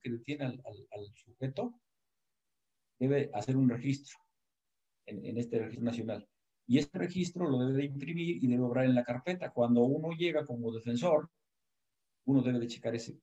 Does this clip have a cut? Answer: no; 0 cuts

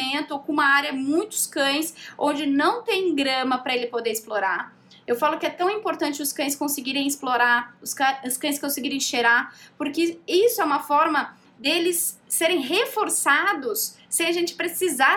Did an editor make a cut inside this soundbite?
no; 0 cuts

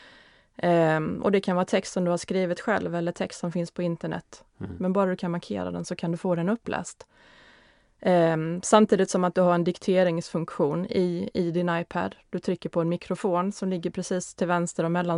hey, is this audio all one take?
yes; 0 cuts

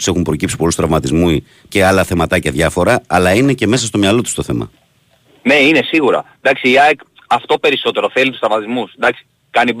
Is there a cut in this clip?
yes; 1 cut; at 1.7 s

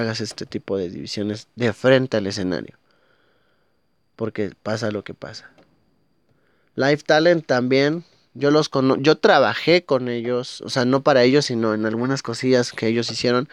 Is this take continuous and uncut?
yes; 0 cuts

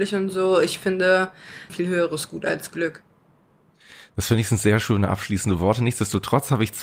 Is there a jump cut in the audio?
yes; 1 cut; at 1.7 s

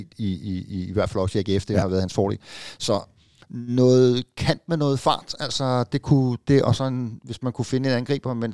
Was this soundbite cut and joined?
no; 0 cuts

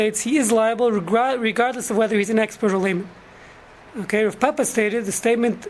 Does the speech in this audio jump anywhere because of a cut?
no; 0 cuts

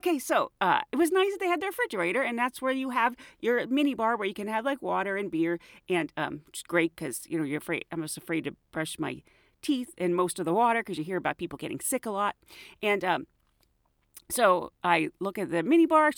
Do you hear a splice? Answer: no; 0 cuts

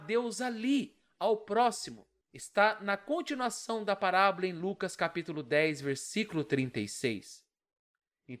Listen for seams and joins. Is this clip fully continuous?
no; 1 cut; at 2.2 s

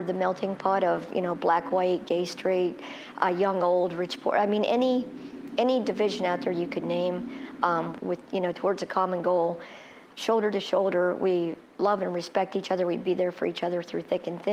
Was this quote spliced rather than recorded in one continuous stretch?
yes; 2 cuts; at 8.0 s, 10.1 s

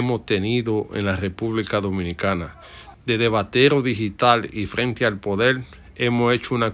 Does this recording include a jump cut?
yes; 1 cut; at 2.9 s

